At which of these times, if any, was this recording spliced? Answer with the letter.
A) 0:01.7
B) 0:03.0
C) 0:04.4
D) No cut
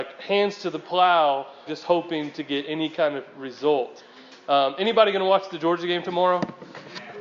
A